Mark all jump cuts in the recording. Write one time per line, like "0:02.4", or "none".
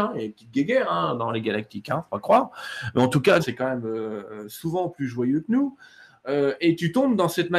0:03.4